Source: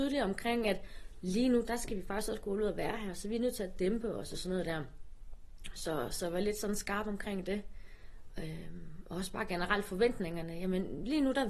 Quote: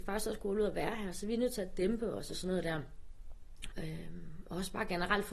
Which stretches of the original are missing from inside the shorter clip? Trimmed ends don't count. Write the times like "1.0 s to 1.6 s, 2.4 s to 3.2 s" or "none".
5.7 s to 8.3 s